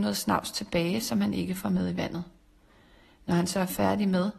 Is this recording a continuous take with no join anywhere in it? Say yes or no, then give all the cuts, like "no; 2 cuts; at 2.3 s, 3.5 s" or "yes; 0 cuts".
yes; 0 cuts